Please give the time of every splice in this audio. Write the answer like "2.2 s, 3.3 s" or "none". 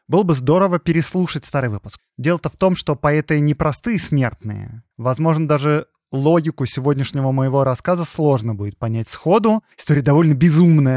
2.0 s, 4.9 s, 9.7 s